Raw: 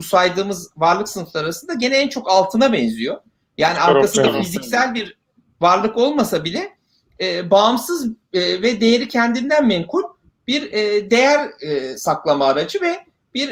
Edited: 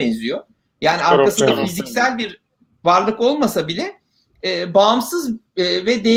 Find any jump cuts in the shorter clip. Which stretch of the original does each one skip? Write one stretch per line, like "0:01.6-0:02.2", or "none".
none